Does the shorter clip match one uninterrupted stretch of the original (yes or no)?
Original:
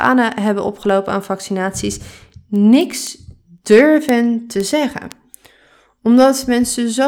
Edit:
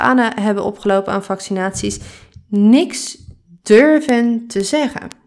yes